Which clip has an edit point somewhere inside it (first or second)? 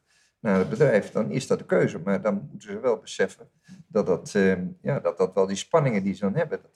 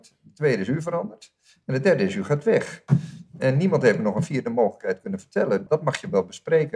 second